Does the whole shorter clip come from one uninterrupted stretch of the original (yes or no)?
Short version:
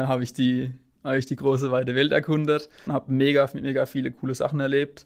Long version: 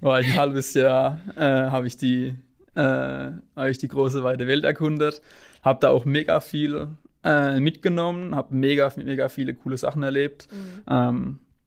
no